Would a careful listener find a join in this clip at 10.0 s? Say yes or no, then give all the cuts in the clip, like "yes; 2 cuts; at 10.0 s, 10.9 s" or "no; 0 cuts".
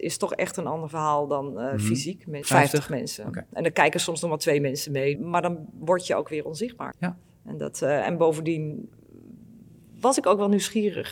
no; 3 cuts; at 2.4 s, 5.2 s, 6.9 s